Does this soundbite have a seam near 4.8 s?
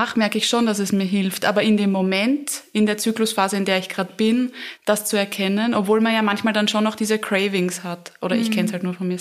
yes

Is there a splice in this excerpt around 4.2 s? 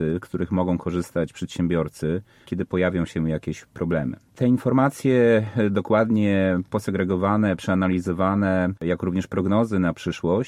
no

